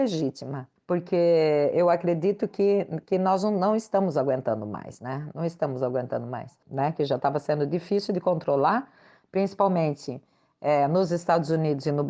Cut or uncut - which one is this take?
uncut